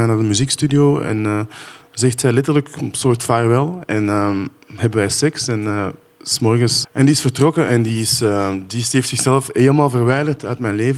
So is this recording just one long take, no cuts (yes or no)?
no